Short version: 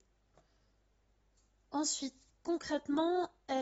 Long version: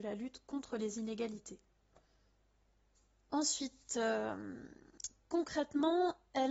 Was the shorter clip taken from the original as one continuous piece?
no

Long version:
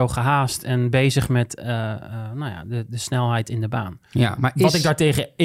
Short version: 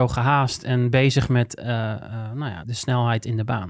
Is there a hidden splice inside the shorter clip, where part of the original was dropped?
yes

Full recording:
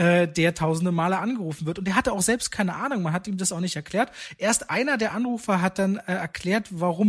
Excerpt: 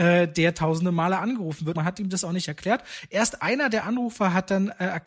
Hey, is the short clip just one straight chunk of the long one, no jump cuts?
no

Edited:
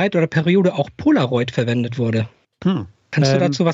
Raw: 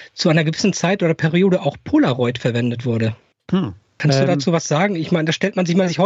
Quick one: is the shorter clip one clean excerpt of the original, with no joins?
yes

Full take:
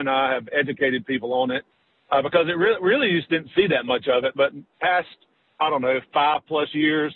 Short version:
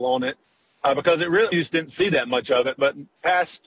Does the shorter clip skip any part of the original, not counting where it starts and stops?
yes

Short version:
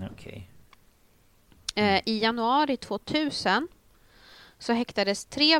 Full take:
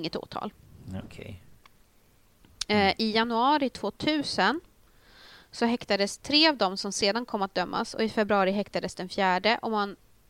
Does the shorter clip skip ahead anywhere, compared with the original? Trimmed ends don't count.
no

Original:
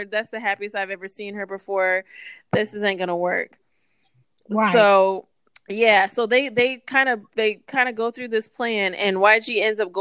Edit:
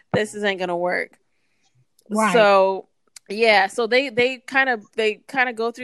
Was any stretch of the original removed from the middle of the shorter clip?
no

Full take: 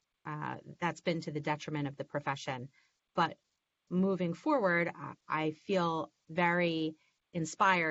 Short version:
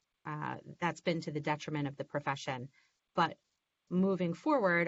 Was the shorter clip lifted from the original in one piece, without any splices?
yes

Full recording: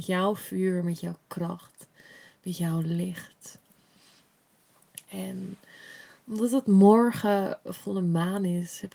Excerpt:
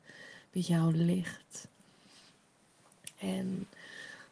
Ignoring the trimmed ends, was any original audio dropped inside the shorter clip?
no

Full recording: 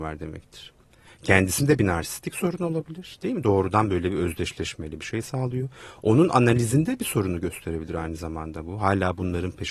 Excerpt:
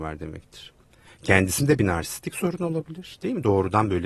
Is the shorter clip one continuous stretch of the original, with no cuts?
yes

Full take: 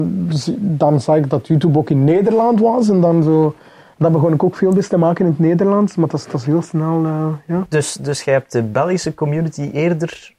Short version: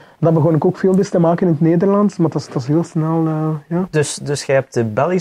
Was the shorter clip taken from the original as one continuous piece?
yes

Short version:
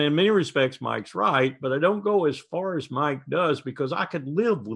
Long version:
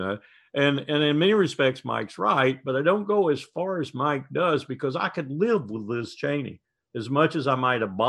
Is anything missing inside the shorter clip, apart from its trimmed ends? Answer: no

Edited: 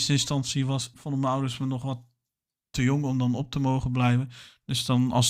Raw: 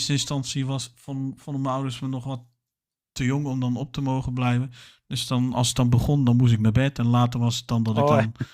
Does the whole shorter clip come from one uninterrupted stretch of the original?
no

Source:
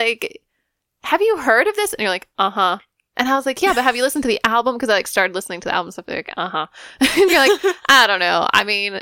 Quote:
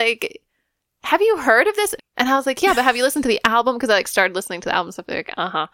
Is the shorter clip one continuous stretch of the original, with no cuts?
no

